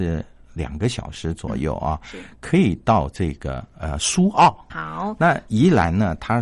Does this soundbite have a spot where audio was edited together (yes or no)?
yes